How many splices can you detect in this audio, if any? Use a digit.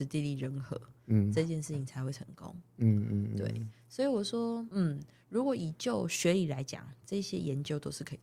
0